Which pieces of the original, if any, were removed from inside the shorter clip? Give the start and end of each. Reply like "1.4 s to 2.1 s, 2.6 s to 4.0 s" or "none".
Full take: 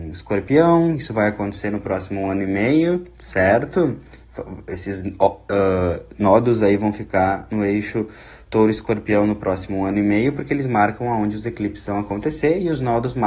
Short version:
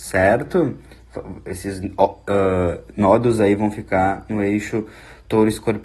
none